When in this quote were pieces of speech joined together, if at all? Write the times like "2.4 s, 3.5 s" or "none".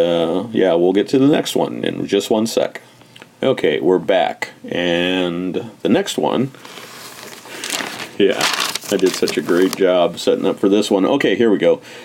none